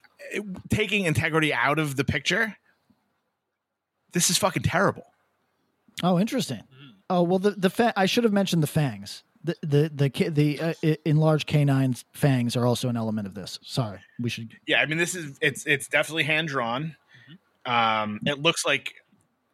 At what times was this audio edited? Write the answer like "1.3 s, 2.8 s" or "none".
7.0 s, 14.5 s